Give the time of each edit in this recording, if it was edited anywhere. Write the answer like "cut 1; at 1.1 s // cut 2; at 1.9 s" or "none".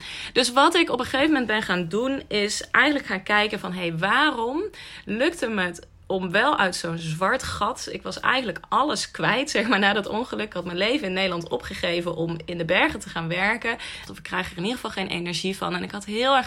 cut 1; at 14.1 s